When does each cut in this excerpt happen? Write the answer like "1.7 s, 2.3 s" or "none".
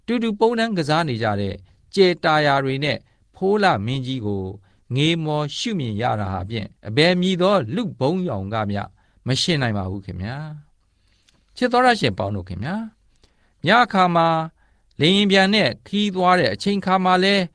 6.8 s